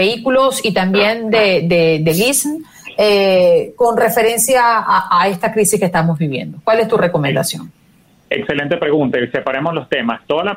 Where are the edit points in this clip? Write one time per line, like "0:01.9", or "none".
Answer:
none